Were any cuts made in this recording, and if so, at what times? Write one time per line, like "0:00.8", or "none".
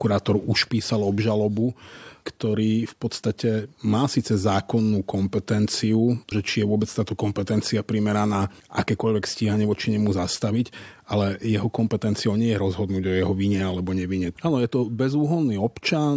0:02.2
0:06.3
0:14.3